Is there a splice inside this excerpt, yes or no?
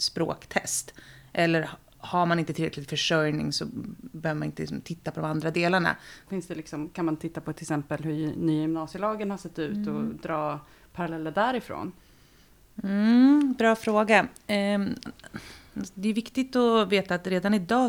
yes